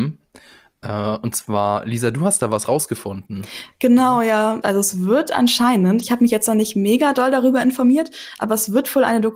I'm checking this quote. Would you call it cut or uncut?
cut